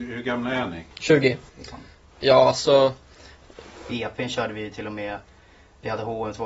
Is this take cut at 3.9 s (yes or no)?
yes